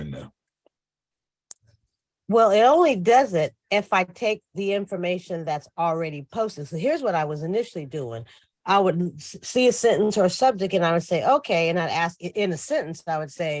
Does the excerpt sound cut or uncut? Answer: uncut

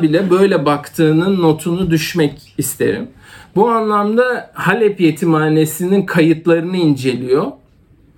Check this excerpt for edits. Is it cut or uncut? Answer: cut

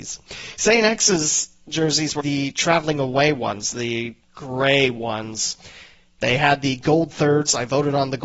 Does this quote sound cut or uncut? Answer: cut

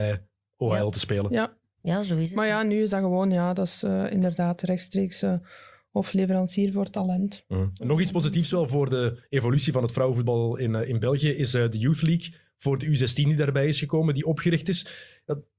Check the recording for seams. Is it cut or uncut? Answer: uncut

